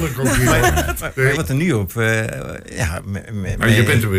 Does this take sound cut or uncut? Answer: cut